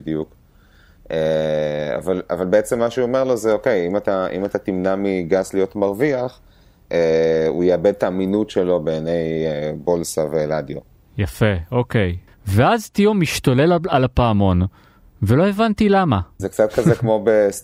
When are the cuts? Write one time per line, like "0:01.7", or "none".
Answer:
0:12.3
0:16.4